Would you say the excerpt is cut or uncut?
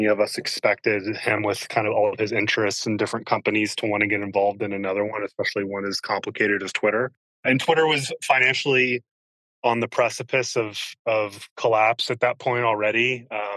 uncut